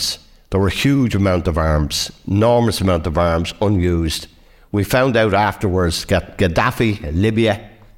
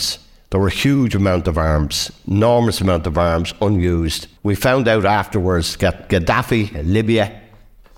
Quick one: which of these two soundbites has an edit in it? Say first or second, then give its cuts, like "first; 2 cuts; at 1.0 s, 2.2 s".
second; 1 cut; at 4.4 s